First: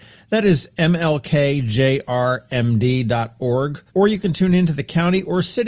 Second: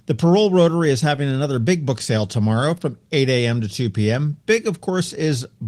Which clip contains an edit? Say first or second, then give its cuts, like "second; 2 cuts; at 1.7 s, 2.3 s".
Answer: first; 1 cut; at 3.9 s